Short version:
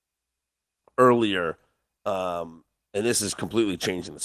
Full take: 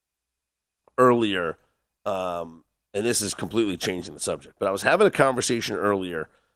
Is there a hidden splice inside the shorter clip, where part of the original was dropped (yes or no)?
no